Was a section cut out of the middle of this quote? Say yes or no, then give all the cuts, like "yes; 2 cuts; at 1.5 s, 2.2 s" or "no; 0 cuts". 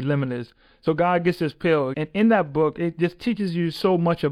yes; 1 cut; at 1.9 s